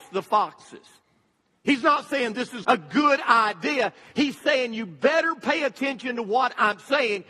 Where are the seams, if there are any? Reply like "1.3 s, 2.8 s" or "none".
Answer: 2.6 s